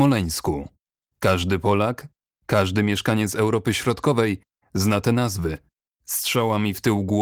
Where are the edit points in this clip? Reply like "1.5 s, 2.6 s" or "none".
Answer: none